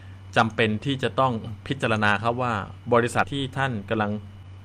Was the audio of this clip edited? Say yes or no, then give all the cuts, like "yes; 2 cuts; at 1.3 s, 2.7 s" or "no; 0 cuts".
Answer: yes; 1 cut; at 3.2 s